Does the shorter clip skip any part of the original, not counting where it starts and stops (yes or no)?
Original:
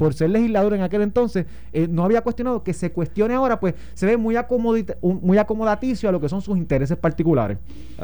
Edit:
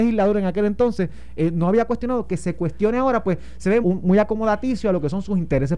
yes